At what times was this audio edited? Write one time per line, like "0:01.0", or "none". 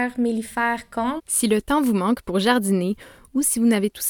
0:01.2